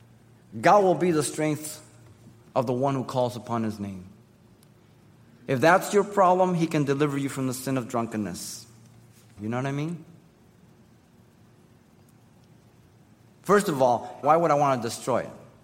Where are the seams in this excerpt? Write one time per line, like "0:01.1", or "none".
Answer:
0:09.4
0:14.2